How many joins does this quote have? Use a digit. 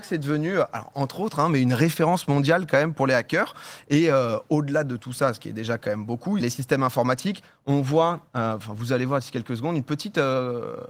1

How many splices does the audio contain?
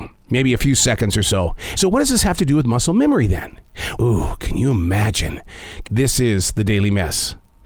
3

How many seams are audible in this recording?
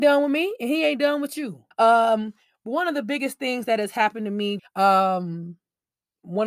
2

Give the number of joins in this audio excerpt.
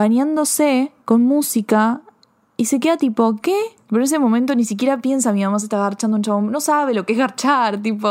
2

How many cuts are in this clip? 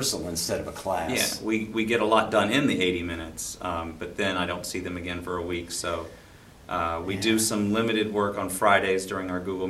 0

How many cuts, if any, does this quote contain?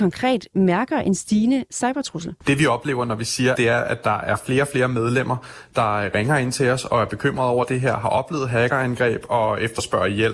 2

